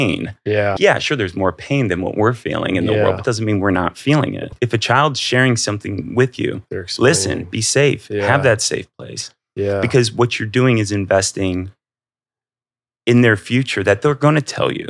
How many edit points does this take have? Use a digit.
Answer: 0